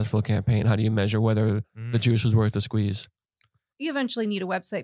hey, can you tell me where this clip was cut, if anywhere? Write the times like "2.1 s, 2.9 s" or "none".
3.7 s